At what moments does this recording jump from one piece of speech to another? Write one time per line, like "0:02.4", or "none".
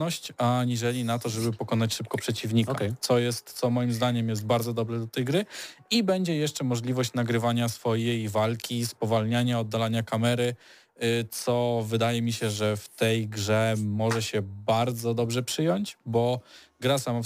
none